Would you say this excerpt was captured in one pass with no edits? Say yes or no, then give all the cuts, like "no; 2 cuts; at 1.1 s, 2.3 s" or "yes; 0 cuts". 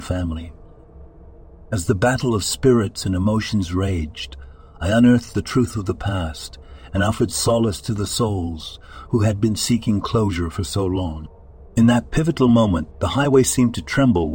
yes; 0 cuts